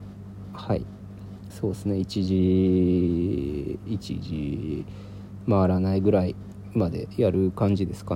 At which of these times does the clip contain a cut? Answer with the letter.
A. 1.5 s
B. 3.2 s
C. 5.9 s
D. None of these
A